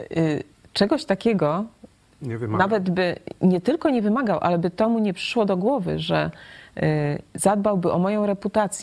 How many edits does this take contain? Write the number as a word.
zero